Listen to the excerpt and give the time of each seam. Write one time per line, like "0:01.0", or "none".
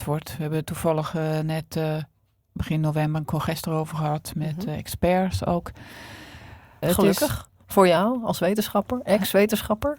0:06.8